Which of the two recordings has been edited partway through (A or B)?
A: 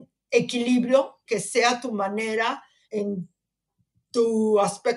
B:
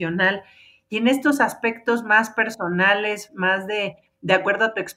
A